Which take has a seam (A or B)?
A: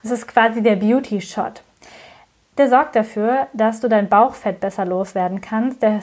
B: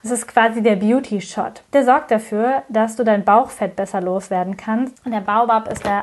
B